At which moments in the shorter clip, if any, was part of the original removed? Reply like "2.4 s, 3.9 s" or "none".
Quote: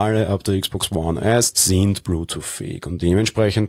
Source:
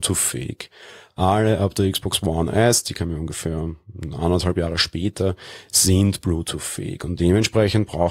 1.5 s